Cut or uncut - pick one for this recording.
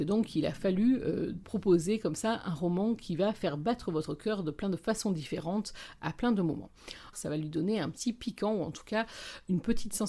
cut